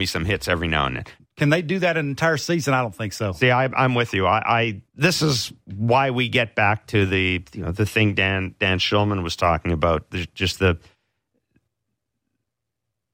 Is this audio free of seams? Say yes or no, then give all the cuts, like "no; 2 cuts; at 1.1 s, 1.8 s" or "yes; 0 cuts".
no; 2 cuts; at 1.2 s, 4.9 s